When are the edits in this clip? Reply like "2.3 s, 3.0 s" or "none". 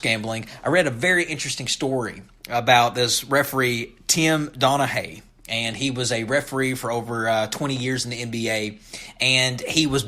none